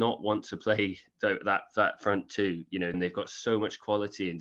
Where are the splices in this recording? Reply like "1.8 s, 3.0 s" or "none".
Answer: 2.9 s